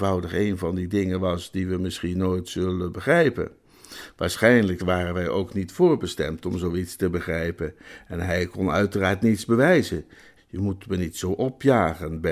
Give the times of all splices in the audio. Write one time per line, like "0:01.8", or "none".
0:04.8
0:10.4